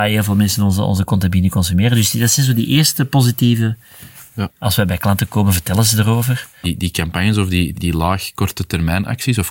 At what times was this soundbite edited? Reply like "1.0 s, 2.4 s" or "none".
4.5 s, 6.6 s, 7.7 s